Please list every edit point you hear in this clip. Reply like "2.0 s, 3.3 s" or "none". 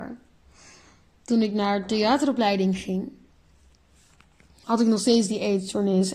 4.6 s

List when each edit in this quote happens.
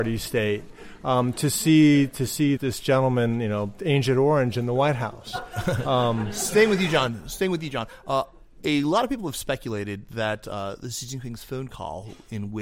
2.6 s

